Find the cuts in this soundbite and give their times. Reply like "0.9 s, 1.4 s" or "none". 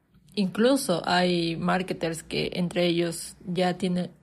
none